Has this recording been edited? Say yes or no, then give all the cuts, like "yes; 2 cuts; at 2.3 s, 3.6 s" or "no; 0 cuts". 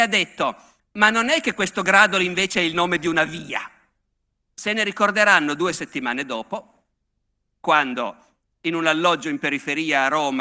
yes; 1 cut; at 4.4 s